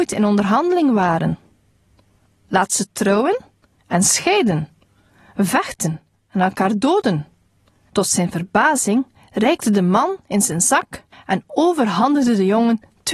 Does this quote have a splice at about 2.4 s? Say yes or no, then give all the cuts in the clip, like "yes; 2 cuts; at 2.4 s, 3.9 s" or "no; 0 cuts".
yes; 2 cuts; at 2.4 s, 7.9 s